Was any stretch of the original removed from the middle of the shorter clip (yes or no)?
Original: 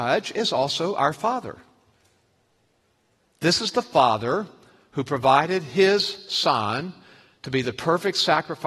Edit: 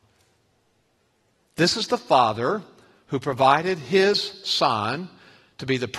no